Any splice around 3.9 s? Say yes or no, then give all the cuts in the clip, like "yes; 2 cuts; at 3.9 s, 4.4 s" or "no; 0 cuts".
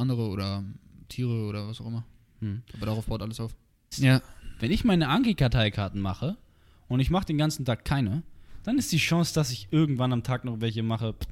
yes; 1 cut; at 3.9 s